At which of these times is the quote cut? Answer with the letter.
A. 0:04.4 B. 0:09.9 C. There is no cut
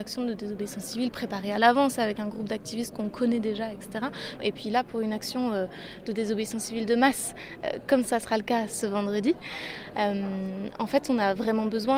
A